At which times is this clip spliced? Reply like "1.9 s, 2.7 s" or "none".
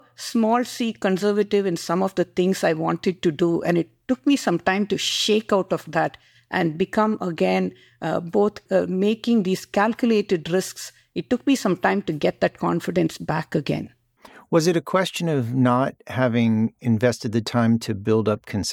none